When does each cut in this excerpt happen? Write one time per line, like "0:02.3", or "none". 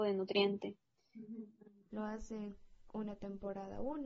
0:01.9